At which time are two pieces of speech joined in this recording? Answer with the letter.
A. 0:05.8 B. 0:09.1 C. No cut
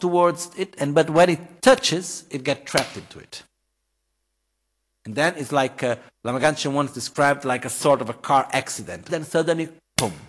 B